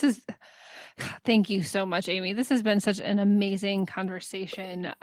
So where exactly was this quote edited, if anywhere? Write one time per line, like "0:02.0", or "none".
none

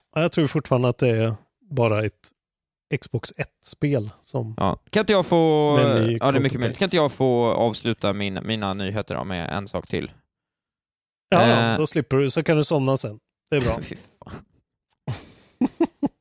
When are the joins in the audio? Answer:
none

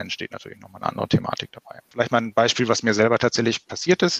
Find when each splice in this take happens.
0:01.9

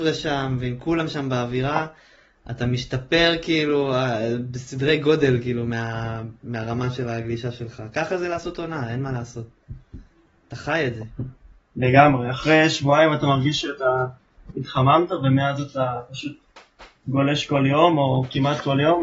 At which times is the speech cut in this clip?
none

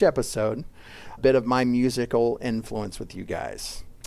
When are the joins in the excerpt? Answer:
0:01.2

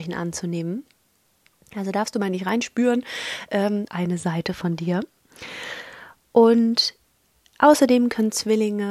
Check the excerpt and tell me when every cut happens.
0:03.9

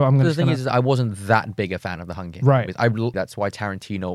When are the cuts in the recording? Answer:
0:03.1

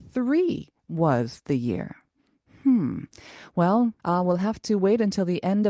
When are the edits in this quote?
0:04.0

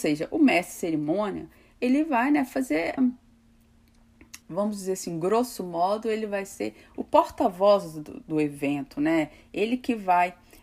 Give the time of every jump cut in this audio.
0:03.0
0:04.4

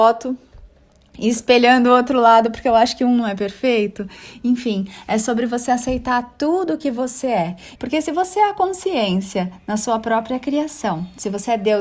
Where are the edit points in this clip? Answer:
0:07.8

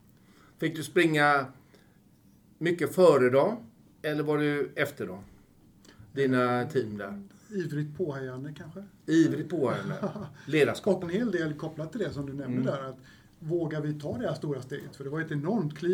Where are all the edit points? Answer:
0:11.0

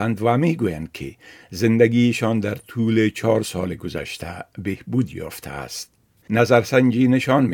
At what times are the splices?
0:06.2

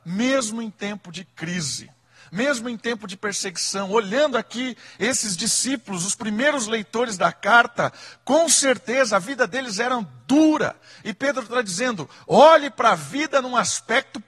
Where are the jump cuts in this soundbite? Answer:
none

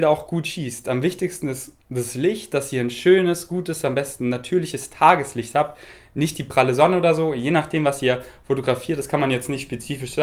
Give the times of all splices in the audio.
none

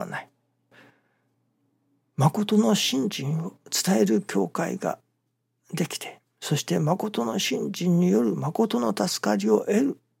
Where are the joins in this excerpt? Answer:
none

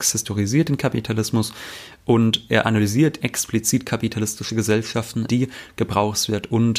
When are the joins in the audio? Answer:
0:03.2
0:05.3

